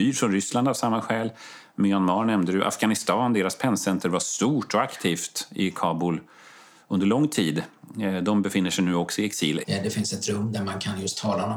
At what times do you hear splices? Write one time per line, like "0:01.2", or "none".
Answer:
0:09.6

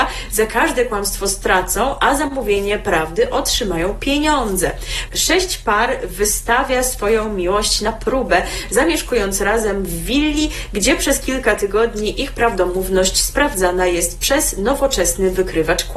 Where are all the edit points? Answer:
0:05.1

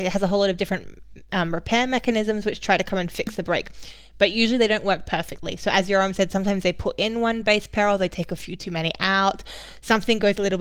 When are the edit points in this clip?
none

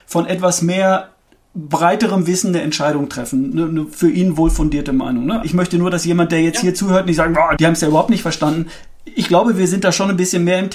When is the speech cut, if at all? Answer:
0:05.4
0:07.6

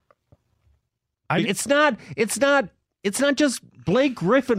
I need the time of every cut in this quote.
0:01.4

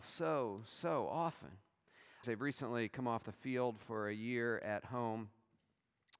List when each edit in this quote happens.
0:02.2

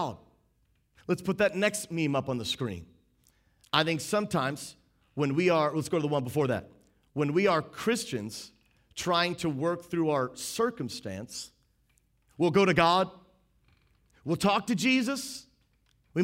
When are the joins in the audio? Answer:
none

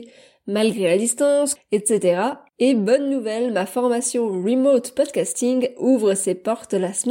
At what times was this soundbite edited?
0:01.6

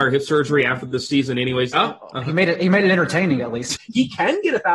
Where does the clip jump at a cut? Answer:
0:01.7
0:03.8

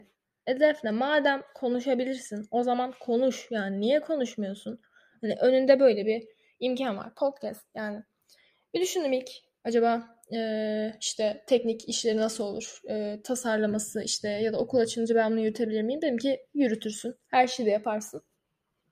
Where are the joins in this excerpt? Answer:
none

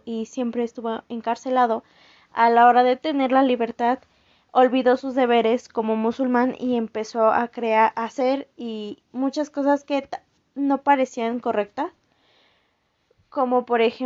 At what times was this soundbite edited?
none

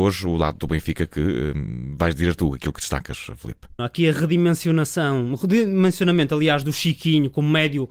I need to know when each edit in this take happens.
0:03.8

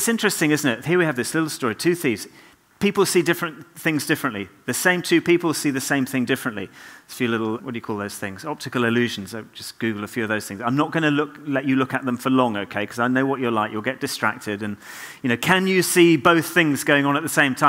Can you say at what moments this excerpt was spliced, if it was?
0:07.6

